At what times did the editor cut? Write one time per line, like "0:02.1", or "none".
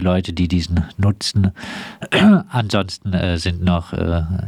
none

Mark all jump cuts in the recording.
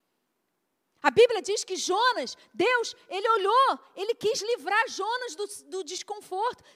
none

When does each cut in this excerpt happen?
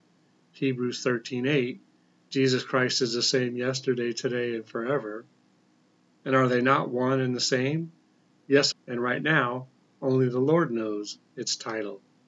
0:08.7

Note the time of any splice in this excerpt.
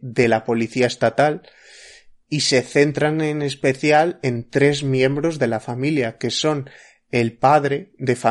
none

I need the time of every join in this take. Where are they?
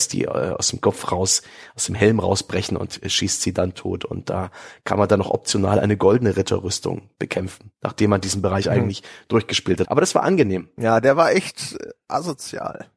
0:09.8

